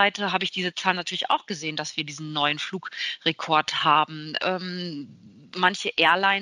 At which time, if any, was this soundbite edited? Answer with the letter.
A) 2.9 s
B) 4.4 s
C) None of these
B